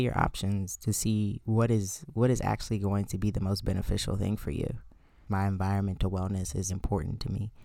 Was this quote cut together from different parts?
yes; 2 cuts; at 5.3 s, 6.7 s

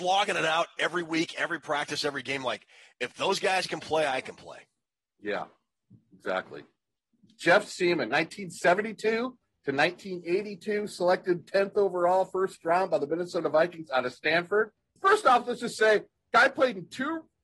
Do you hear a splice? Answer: no; 0 cuts

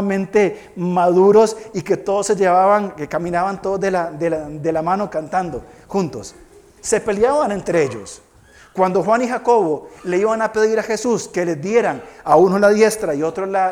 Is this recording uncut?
yes; 0 cuts

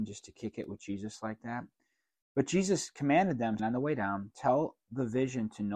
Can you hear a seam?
yes; 1 cut; at 3.6 s

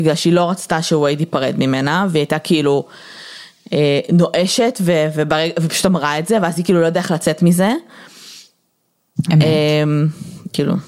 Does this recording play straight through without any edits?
no; 1 cut; at 9.3 s

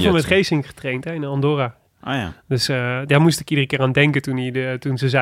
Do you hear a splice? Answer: no; 0 cuts

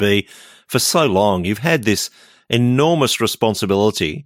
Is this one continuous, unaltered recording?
yes; 0 cuts

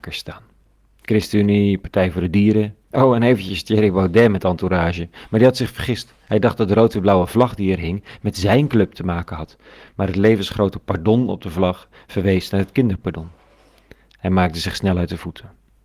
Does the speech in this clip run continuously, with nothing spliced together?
no; 1 cut; at 2.8 s

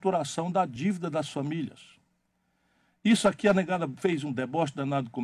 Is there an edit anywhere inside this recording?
no; 0 cuts

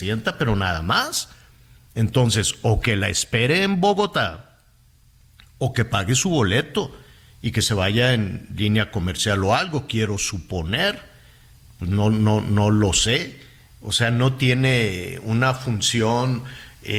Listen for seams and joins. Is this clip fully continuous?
yes; 0 cuts

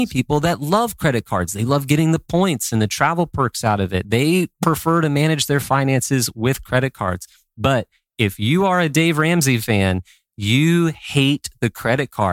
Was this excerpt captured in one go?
yes; 0 cuts

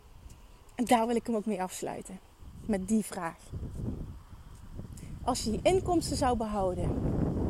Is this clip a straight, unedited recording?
yes; 0 cuts

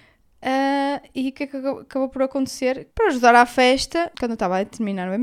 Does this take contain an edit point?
yes; 2 cuts; at 2.9 s, 4.1 s

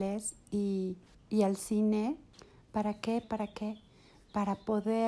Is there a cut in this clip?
yes; 1 cut; at 3.2 s

